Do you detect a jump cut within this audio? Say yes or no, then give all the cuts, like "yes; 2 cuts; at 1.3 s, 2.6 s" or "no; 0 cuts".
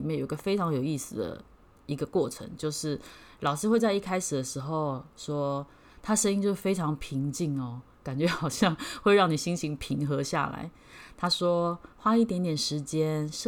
no; 0 cuts